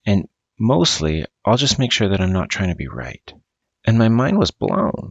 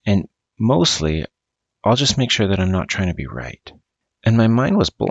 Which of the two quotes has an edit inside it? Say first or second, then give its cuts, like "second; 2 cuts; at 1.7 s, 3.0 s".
first; 1 cut; at 1.3 s